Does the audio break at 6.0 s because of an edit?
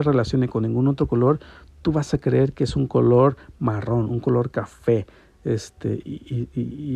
yes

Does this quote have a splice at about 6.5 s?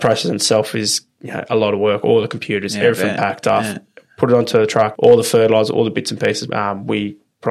yes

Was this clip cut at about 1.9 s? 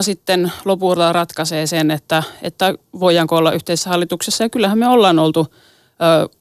no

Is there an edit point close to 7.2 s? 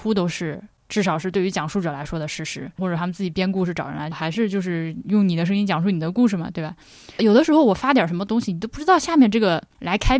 yes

